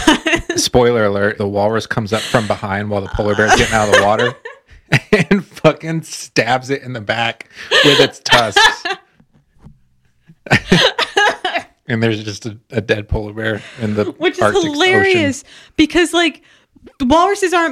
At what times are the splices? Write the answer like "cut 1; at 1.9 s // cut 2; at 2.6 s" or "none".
cut 1; at 1.4 s